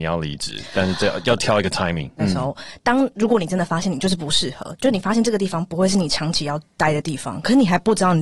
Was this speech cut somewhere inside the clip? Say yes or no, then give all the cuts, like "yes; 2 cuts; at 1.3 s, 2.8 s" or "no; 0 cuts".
yes; 1 cut; at 2.2 s